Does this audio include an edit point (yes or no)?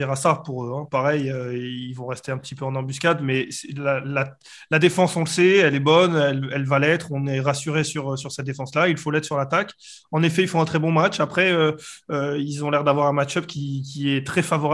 no